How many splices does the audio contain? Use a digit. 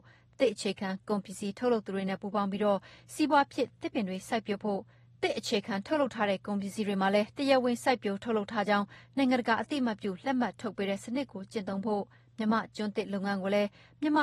0